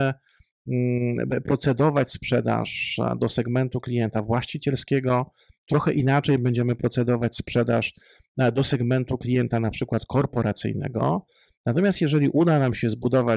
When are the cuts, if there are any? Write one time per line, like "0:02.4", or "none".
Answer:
none